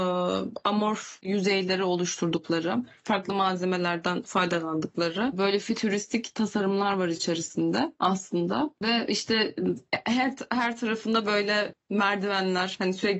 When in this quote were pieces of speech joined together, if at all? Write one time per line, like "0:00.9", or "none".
none